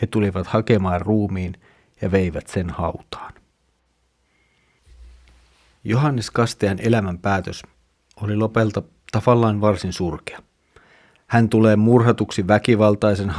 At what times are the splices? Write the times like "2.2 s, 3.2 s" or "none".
none